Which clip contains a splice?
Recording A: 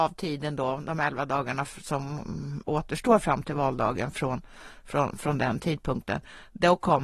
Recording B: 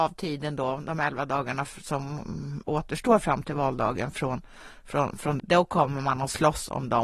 B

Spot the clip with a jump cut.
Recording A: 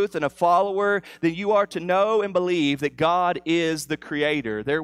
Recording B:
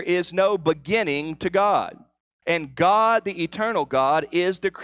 B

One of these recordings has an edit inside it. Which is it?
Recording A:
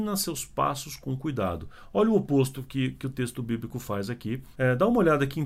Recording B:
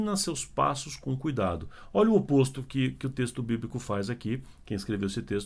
A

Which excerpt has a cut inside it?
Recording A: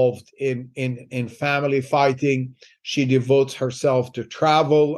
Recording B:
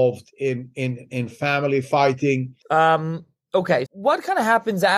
B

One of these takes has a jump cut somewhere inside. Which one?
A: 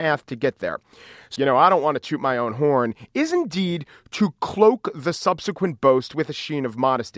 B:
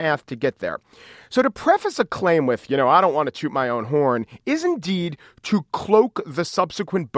A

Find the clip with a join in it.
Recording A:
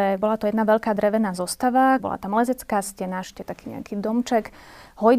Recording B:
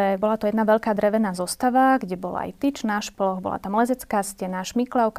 A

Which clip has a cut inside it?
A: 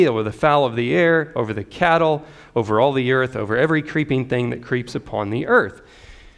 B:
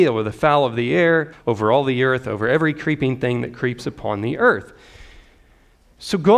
B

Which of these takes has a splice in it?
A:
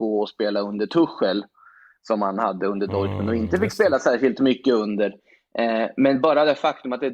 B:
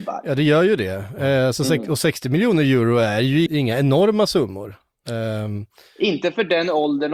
B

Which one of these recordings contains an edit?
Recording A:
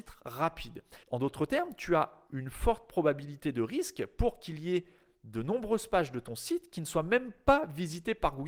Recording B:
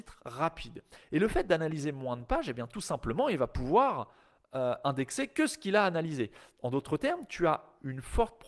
A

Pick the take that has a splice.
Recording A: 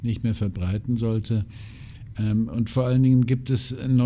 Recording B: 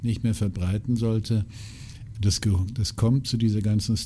B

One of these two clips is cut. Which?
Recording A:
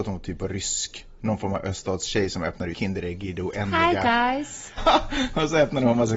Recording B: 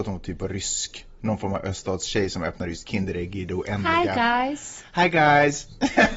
A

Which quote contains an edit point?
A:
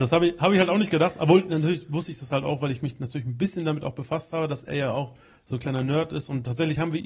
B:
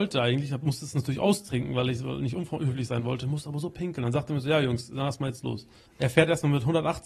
B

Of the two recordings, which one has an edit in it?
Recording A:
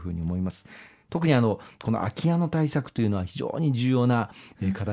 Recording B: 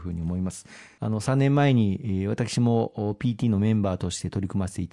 B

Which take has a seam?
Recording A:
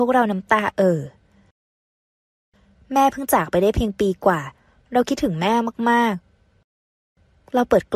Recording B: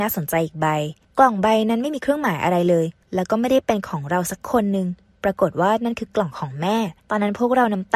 B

